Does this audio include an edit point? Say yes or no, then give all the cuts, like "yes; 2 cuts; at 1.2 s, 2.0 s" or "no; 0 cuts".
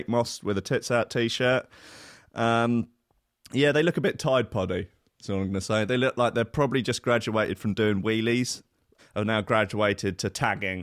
yes; 1 cut; at 9.0 s